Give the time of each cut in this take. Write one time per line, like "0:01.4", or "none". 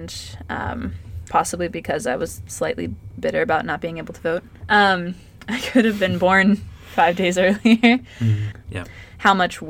0:01.3
0:08.7